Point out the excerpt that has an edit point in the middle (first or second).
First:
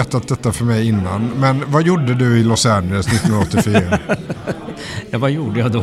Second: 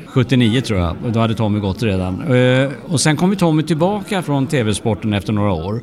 second